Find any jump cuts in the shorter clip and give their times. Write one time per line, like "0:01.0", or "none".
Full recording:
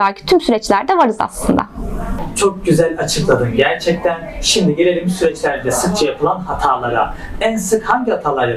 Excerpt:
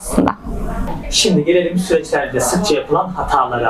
0:01.0